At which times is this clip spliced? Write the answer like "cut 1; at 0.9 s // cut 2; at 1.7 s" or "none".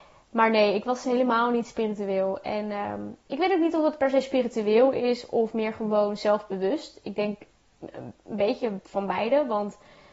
cut 1; at 3.2 s